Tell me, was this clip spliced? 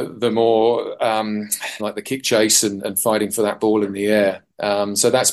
yes; 2 cuts; at 1.8 s, 2.8 s

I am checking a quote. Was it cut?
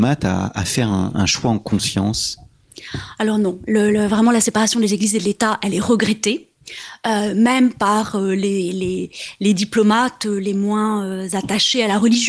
no; 0 cuts

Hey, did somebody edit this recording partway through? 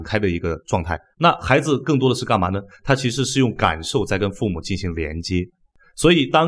yes; 1 cut; at 1.1 s

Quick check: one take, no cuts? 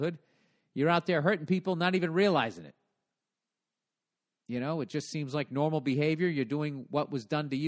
yes; 0 cuts

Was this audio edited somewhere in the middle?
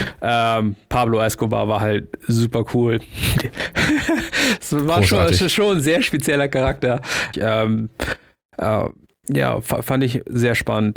yes; 1 cut; at 7.3 s

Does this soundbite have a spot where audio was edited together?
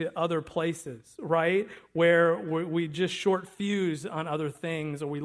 no; 0 cuts

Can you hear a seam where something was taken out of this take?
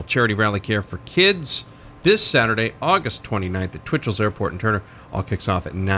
no; 0 cuts

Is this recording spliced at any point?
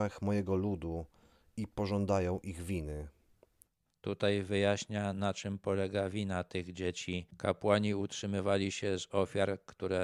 no; 0 cuts

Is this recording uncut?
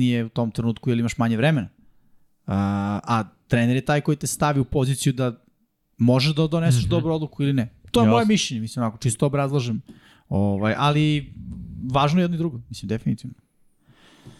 yes; 0 cuts

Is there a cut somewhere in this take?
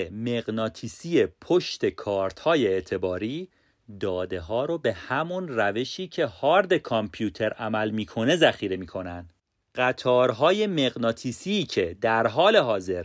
no; 0 cuts

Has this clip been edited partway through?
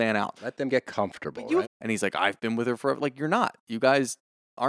yes; 1 cut; at 1.6 s

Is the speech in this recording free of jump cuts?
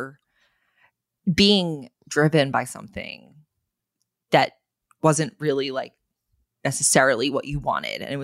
yes; 0 cuts

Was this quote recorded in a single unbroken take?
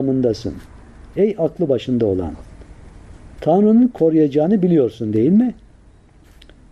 yes; 0 cuts

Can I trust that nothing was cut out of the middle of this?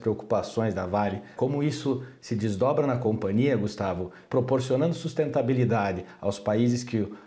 no; 1 cut; at 1.4 s

